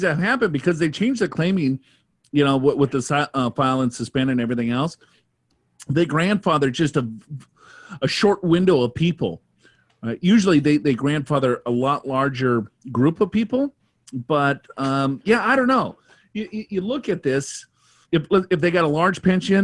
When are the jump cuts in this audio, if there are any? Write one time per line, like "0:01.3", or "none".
0:18.0